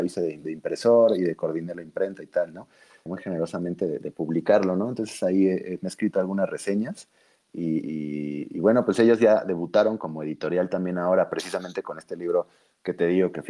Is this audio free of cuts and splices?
no; 1 cut; at 3.1 s

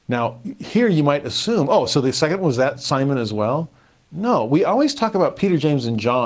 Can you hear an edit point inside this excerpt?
no; 0 cuts

